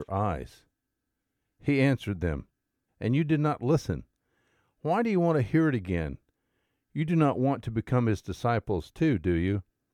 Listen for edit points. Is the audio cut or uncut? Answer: cut